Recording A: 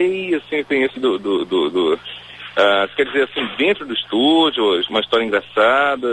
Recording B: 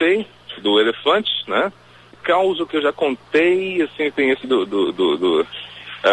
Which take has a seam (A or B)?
B